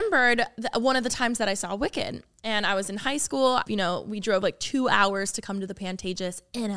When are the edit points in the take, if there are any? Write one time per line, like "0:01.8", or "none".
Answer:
0:03.6